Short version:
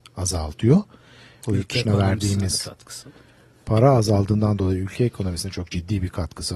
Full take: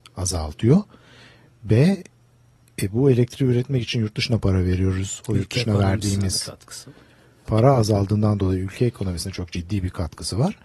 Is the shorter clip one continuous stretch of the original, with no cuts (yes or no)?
no